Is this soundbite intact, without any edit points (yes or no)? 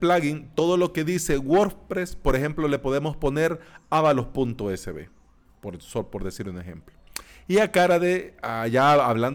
yes